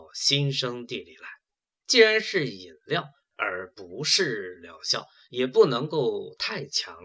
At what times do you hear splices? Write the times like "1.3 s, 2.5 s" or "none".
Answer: 1.8 s, 3.3 s